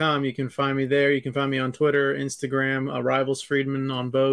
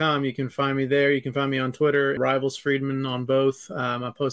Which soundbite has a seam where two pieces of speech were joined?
second; 1 cut; at 2.2 s

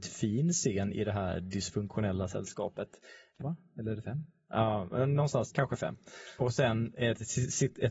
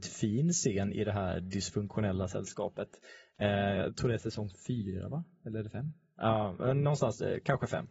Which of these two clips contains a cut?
first; 2 cuts; at 3.4 s, 5.5 s

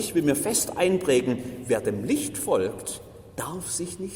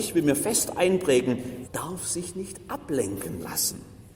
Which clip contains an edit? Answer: second; 1 cut; at 1.6 s

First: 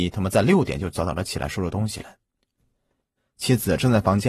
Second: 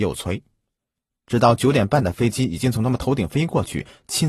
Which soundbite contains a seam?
first; 1 cut; at 3.2 s

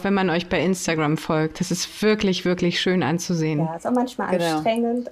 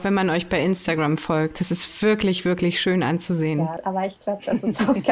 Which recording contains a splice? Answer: second; 1 cut; at 3.8 s

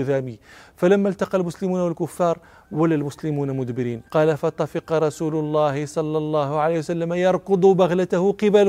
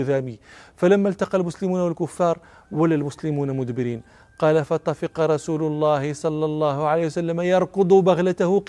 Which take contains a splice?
first; 1 cut; at 4.1 s

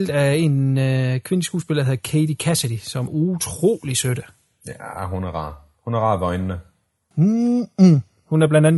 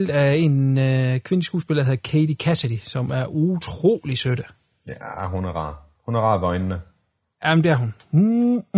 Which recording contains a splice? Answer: first; 2 cuts; at 3.1 s, 7.1 s

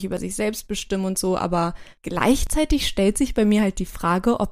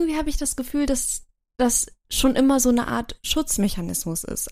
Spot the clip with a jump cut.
first; 1 cut; at 2.0 s

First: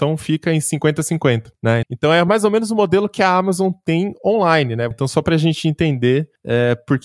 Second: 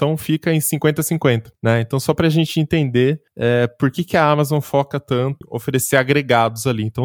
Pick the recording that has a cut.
first; 2 cuts; at 1.8 s, 4.9 s

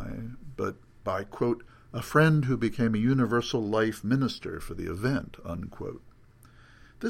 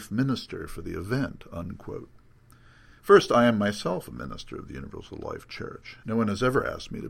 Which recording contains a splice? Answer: second; 2 cuts; at 3.0 s, 6.0 s

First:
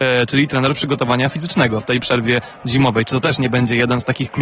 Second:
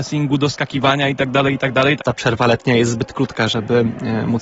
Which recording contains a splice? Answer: second; 1 cut; at 2.0 s

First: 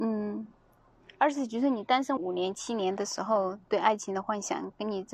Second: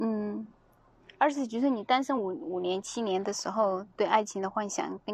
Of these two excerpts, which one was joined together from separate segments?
first; 1 cut; at 2.2 s

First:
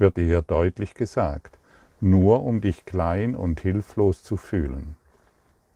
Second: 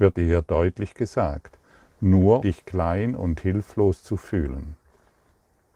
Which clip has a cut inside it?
second; 1 cut; at 2.4 s

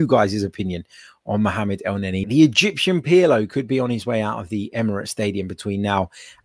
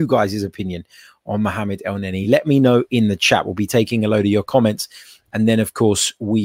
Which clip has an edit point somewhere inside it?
first; 1 cut; at 2.2 s

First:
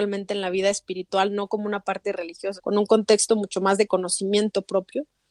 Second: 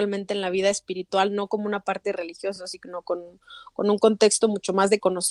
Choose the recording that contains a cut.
first; 1 cut; at 2.6 s

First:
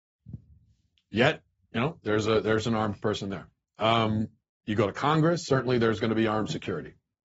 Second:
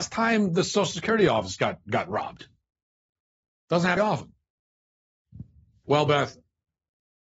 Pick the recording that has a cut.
second; 2 cuts; at 4.0 s, 5.8 s

